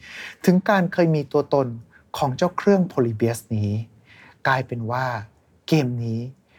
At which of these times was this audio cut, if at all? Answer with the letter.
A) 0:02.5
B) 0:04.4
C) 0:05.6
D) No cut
D